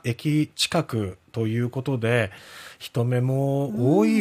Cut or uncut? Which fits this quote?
uncut